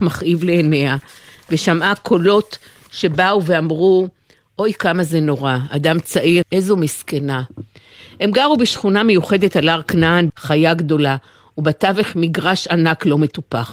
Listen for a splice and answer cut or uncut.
cut